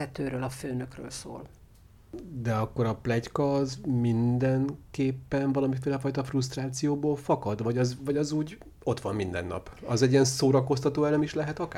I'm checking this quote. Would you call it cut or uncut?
uncut